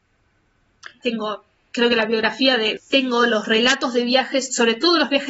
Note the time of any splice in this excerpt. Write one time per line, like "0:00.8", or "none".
0:01.0
0:02.8